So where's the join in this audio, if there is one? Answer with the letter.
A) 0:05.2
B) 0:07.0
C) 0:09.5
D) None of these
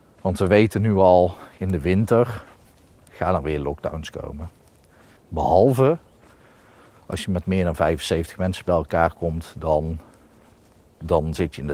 A